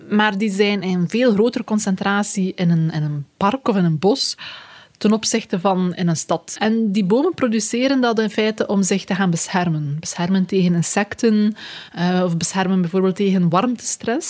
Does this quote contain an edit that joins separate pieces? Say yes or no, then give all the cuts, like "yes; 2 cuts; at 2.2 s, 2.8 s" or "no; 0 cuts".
no; 0 cuts